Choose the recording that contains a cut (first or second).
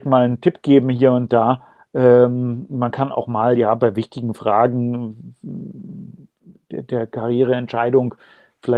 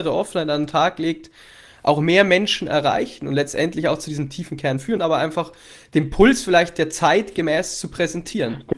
second